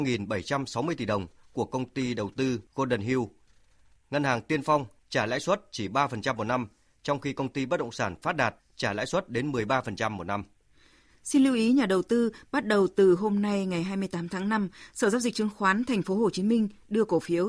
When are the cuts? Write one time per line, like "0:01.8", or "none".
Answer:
none